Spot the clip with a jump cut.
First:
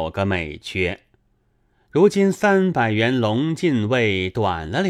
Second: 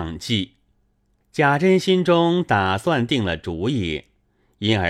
second; 1 cut; at 1.2 s

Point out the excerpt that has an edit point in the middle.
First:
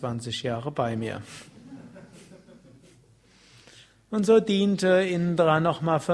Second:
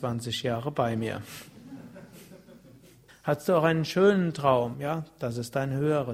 second; 2 cuts; at 3.1 s, 4.7 s

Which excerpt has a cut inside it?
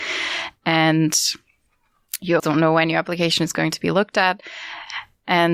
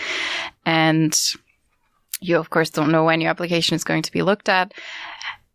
first; 1 cut; at 2.4 s

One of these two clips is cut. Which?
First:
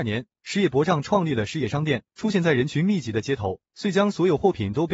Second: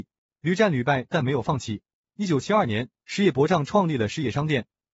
first; 2 cuts; at 2.1 s, 3.7 s

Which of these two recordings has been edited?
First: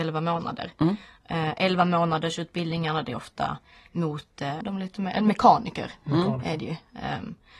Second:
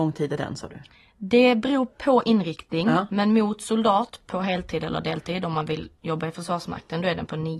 first; 1 cut; at 4.6 s

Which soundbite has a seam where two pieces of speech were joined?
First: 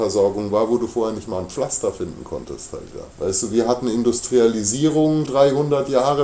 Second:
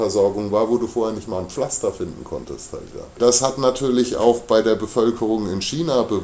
first; 2 cuts; at 3.1 s, 5.3 s

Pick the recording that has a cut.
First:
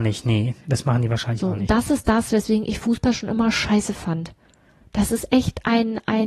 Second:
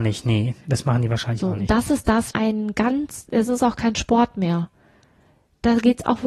second; 1 cut; at 2.3 s

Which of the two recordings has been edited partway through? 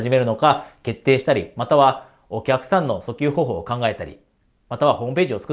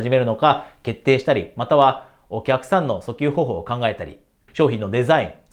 second; 1 cut; at 4.5 s

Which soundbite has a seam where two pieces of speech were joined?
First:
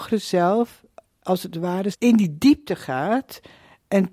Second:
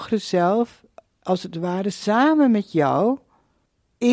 first; 1 cut; at 1.9 s

